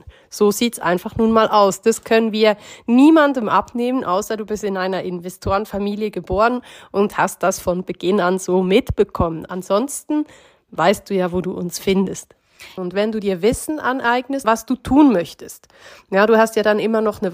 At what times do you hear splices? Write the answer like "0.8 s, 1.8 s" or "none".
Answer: 12.8 s, 14.4 s